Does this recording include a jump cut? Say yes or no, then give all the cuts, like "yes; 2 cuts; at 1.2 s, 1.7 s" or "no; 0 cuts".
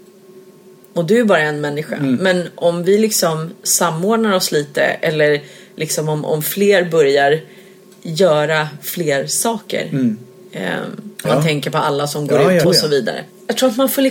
yes; 2 cuts; at 11.3 s, 12.6 s